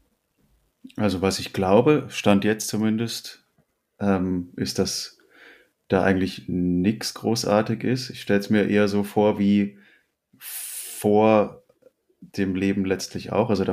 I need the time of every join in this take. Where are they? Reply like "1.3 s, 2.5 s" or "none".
none